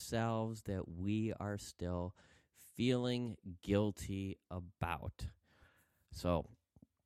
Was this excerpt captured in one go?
yes; 0 cuts

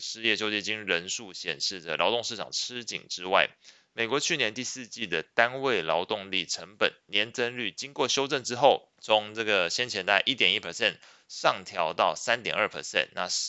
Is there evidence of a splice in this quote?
yes; 1 cut; at 8.9 s

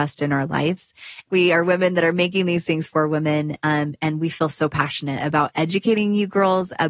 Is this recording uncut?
no; 1 cut; at 1.3 s

